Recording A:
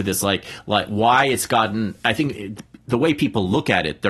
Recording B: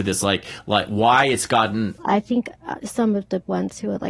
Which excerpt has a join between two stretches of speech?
B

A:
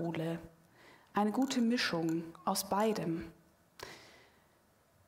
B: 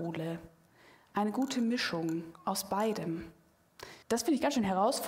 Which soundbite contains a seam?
B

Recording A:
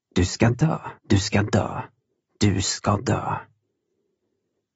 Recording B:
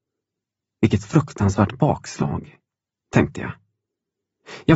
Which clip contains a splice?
A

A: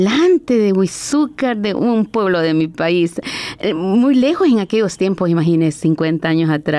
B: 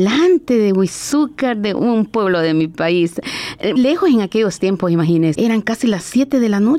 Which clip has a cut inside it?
B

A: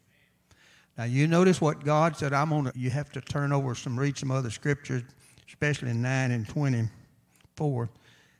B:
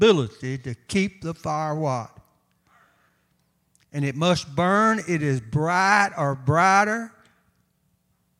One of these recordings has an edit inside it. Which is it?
A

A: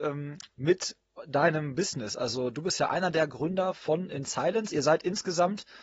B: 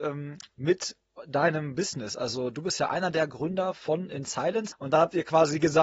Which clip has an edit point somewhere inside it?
B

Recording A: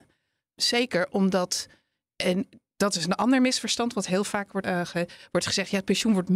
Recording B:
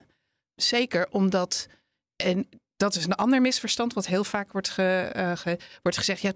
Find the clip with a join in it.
A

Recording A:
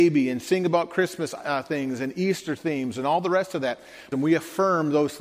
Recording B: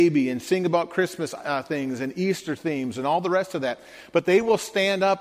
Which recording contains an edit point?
A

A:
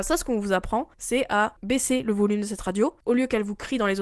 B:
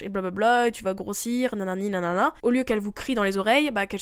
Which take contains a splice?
B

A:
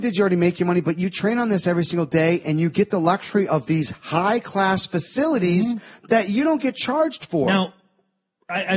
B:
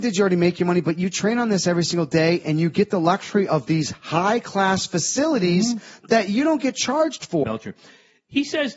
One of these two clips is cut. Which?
B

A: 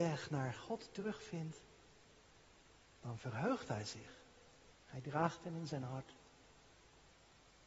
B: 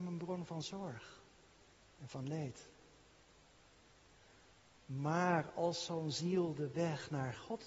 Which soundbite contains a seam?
A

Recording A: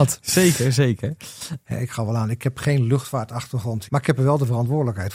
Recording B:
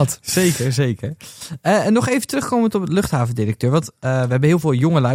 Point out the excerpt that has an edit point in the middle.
A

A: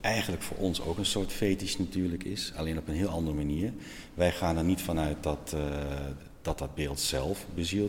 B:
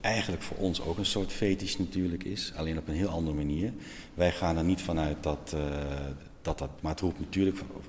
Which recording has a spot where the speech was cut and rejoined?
B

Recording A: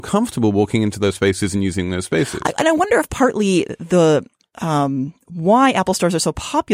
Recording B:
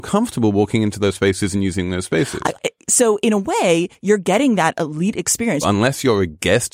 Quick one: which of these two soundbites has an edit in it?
B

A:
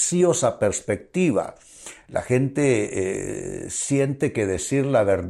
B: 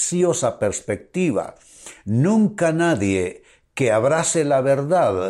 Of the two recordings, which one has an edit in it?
A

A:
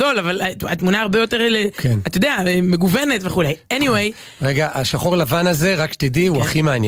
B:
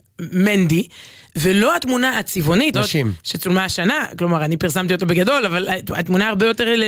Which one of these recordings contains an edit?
B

